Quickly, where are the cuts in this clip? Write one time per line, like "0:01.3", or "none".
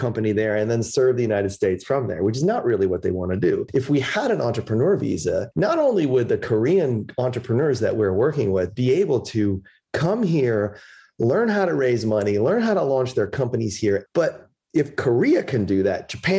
0:14.1